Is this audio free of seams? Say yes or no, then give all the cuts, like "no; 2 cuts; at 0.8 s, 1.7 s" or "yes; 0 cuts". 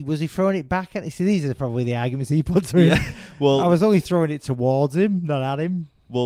yes; 0 cuts